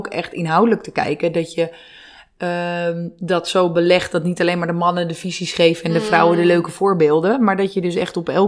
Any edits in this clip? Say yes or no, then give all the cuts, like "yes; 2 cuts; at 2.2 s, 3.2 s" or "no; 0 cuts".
no; 0 cuts